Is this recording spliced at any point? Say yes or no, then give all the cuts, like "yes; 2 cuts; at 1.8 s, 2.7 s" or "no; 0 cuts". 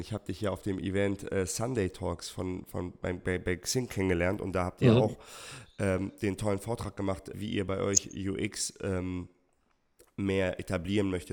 yes; 1 cut; at 7.3 s